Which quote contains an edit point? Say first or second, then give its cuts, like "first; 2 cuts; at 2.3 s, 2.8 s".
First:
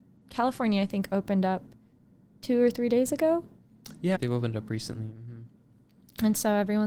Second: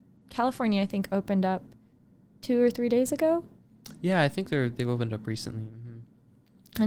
first; 1 cut; at 4.1 s